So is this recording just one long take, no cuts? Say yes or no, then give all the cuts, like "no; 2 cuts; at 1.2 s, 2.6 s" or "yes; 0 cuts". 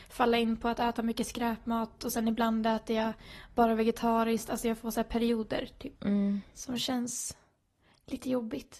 no; 1 cut; at 6.0 s